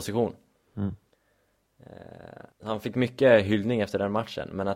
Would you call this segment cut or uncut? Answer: cut